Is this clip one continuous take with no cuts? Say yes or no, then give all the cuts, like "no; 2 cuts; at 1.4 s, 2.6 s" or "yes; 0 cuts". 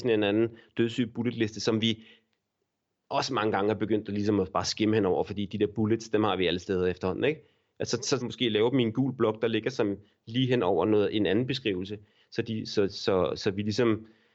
no; 1 cut; at 8.2 s